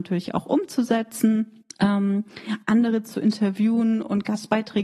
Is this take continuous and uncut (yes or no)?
no